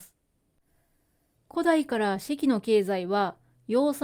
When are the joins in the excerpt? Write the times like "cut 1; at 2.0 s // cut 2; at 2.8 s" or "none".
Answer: cut 1; at 1.4 s